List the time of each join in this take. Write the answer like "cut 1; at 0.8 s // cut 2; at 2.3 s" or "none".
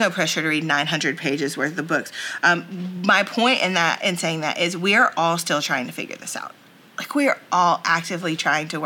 none

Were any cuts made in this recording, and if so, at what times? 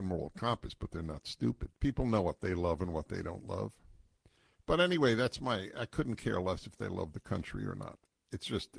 cut 1; at 1.7 s

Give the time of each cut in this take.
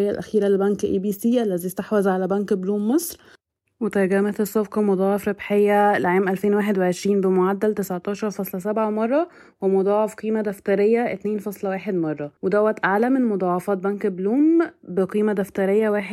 cut 1; at 12.4 s

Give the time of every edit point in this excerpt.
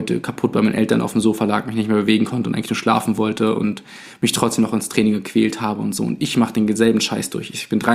none

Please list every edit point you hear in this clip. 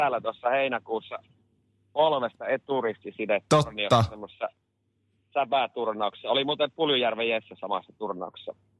none

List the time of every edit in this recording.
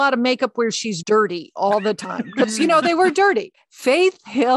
cut 1; at 1.0 s // cut 2; at 3.5 s

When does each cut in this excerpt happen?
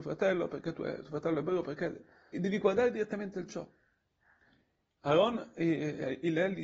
cut 1; at 2.3 s

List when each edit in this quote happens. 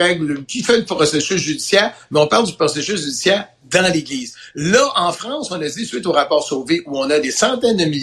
none

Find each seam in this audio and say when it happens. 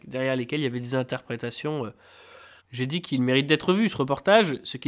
cut 1; at 2.6 s

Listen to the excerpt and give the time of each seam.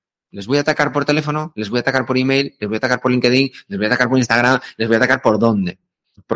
none

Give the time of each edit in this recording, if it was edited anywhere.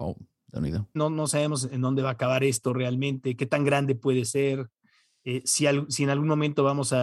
cut 1; at 1.0 s

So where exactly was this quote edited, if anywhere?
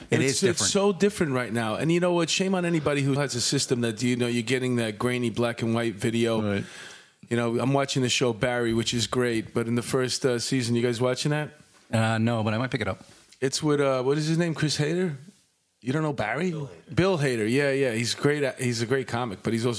cut 1; at 3.2 s

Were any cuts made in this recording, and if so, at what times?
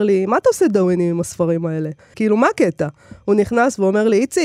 cut 1; at 2.1 s

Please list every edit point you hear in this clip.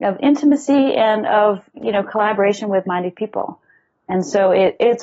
cut 1; at 1.7 s // cut 2; at 2.8 s

